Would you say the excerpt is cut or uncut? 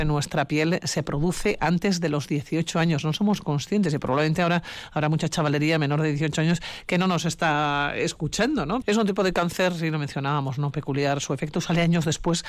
cut